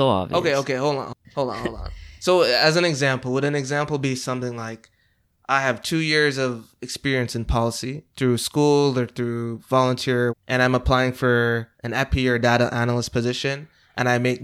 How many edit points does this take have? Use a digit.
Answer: 2